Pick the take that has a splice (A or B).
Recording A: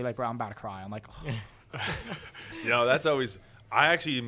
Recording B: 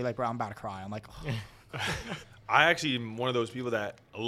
B